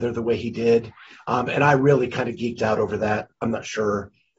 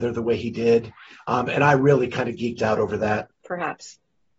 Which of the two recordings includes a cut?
second; 1 cut; at 3.3 s

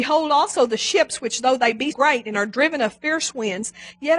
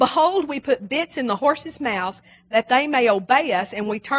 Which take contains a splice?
first; 1 cut; at 1.9 s

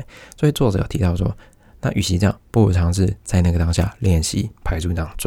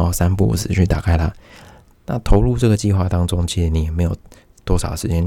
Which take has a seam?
second; 1 cut; at 2.0 s

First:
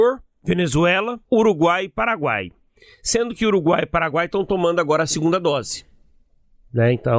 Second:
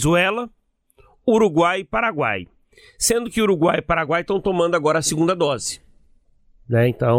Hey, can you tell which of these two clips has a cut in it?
first; 1 cut; at 1.3 s

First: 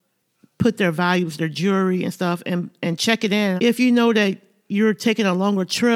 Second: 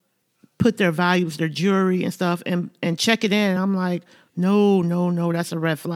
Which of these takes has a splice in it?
first; 1 cut; at 3.6 s

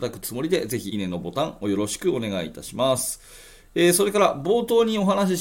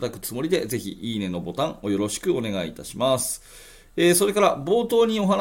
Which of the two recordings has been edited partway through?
first; 1 cut; at 0.9 s

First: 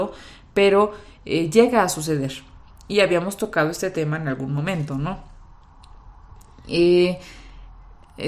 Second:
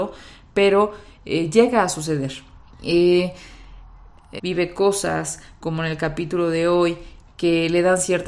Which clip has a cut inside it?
second; 2 cuts; at 2.7 s, 4.4 s

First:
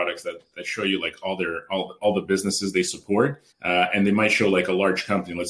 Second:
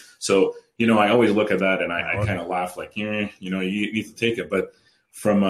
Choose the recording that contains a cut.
first; 1 cut; at 3.5 s

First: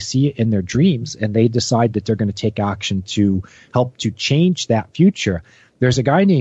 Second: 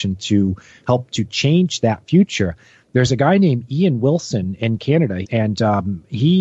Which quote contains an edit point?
second; 1 cut; at 5.2 s

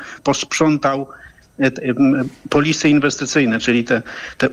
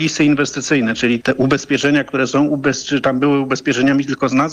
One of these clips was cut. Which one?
second; 1 cut; at 1.2 s

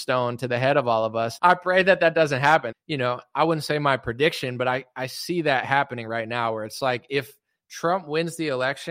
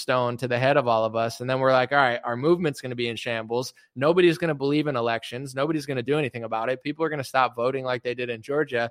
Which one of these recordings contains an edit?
first; 2 cuts; at 1.4 s, 2.7 s

